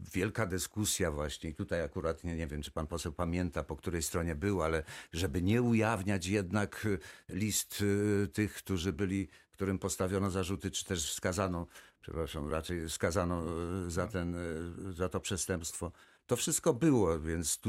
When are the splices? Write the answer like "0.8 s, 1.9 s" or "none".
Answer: none